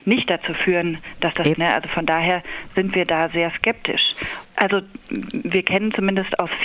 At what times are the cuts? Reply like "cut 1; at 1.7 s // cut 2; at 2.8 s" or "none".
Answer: cut 1; at 1.6 s // cut 2; at 4.4 s

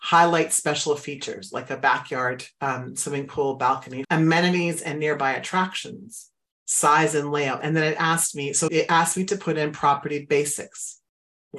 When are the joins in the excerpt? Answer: cut 1; at 4.0 s // cut 2; at 7.6 s // cut 3; at 8.7 s

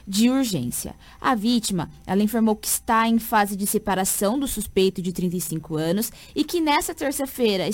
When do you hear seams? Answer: none

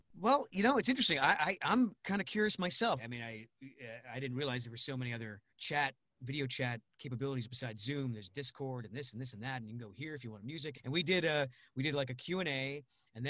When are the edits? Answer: cut 1; at 3.0 s // cut 2; at 5.5 s // cut 3; at 10.7 s

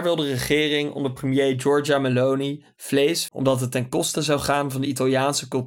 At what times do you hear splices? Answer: cut 1; at 3.3 s

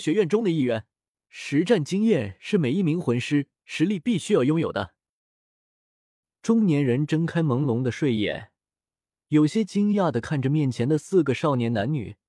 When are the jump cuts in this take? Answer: cut 1; at 1.1 s // cut 2; at 5.6 s

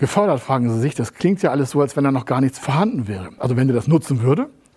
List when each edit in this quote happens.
cut 1; at 3.4 s

